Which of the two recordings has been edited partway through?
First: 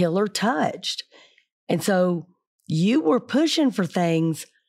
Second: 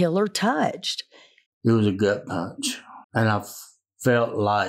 second; 2 cuts; at 1.5 s, 3.0 s

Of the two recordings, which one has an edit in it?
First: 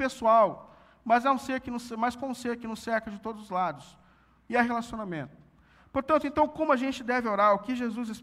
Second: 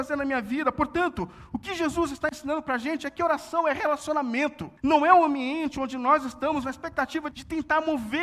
second; 2 cuts; at 4.8 s, 7.3 s

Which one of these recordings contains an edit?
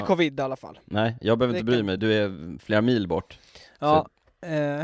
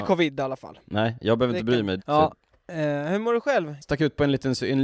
second; 2 cuts; at 2.0 s, 3.8 s

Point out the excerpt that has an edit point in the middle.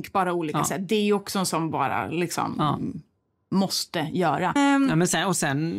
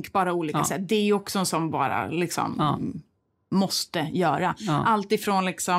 first; 1 cut; at 4.6 s

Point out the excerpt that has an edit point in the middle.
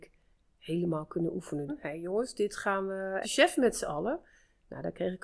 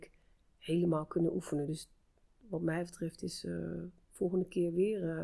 first; 2 cuts; at 1.7 s, 3.2 s

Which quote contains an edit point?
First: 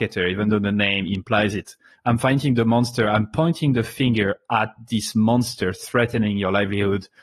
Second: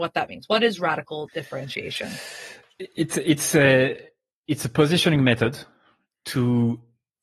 first; 1 cut; at 1.9 s

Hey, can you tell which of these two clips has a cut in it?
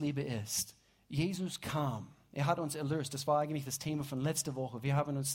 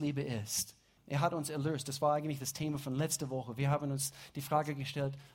second; 1 cut; at 1.0 s

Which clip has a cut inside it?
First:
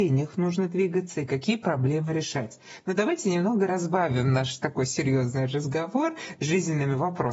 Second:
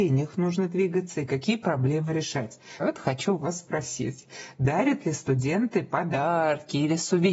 second; 1 cut; at 2.8 s

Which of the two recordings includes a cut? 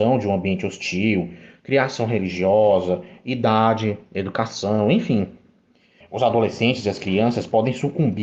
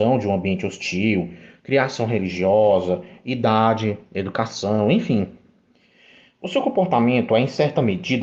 first; 1 cut; at 6.0 s

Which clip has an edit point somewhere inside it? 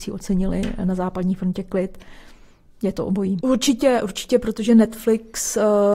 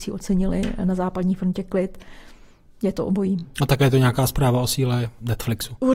first; 1 cut; at 3.4 s

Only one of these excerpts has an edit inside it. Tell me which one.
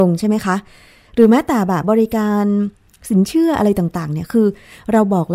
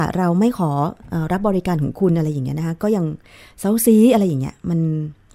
first; 1 cut; at 1.8 s

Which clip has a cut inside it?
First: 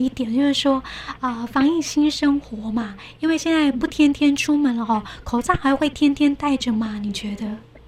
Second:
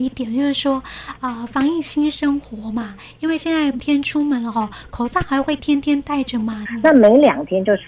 second; 2 cuts; at 3.8 s, 6.7 s

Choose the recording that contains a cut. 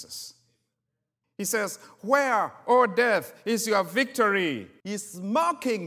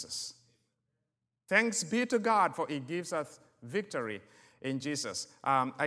first; 2 cuts; at 1.2 s, 4.8 s

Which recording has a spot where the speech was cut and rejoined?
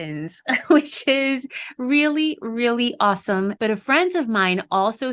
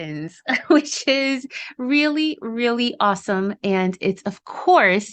first; 1 cut; at 3.6 s

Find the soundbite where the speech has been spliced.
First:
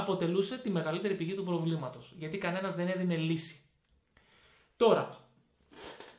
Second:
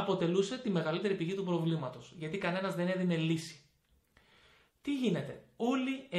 second; 1 cut; at 4.7 s

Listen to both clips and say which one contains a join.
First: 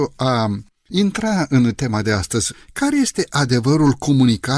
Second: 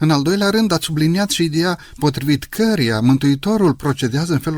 first; 1 cut; at 2.5 s

